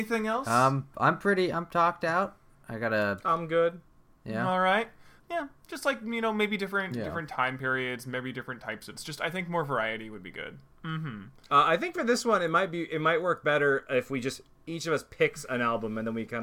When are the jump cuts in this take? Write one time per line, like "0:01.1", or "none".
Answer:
0:05.2
0:10.7